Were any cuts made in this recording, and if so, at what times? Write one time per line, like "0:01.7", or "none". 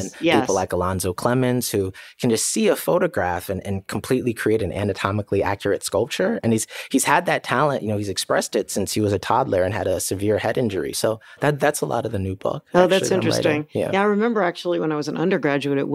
0:10.9